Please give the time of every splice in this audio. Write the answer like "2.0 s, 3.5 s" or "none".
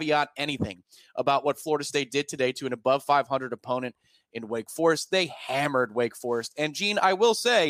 none